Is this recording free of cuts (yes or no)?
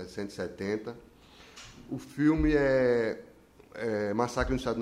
yes